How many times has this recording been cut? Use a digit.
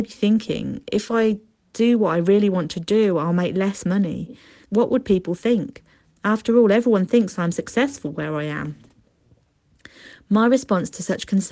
1